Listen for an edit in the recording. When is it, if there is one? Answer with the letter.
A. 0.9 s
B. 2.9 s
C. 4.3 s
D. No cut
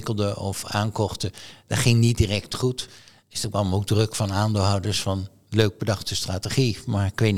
D